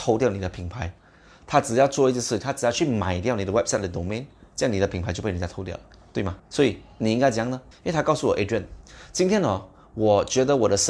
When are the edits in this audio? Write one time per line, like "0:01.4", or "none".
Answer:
0:06.4
0:07.7

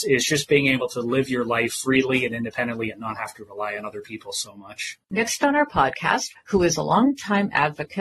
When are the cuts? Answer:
0:05.0
0:06.3

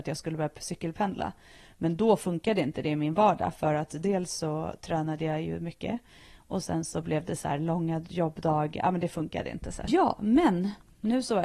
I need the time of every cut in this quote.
0:09.9

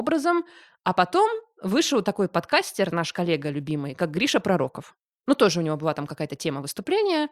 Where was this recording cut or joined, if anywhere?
none

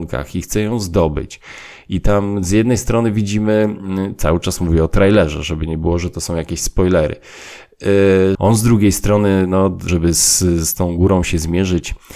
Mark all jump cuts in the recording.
0:08.3
0:09.9

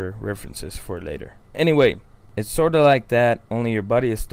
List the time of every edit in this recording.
none

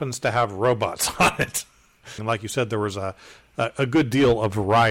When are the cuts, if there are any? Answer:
0:02.2

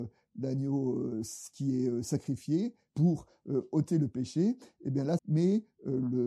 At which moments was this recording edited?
0:02.9
0:05.2

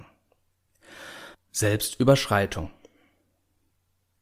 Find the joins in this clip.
0:01.3

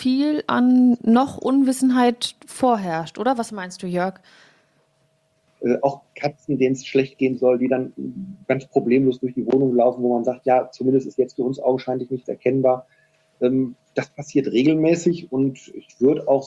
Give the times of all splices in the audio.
0:05.5

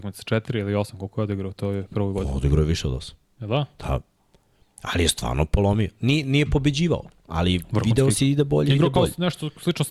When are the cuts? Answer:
none

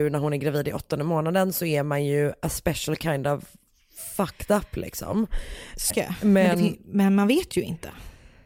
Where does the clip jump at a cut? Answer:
0:05.9

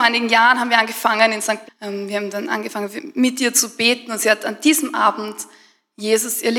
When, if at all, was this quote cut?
0:01.7

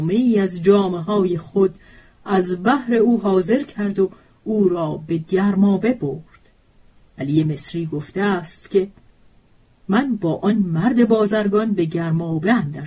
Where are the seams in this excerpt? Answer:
none

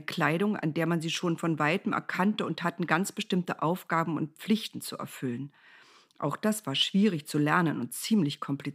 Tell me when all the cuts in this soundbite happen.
none

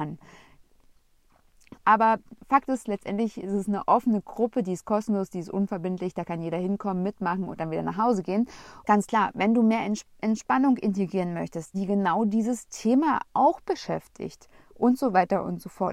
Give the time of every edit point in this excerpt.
0:01.8
0:08.8
0:11.7

